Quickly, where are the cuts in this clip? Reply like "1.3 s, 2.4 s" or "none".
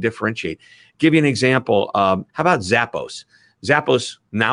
2.3 s